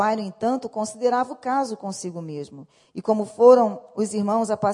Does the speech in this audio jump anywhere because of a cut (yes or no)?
no